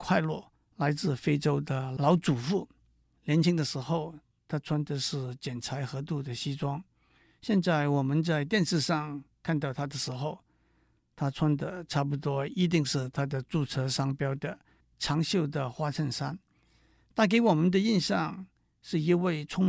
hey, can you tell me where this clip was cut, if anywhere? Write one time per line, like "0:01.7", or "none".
0:03.2
0:14.8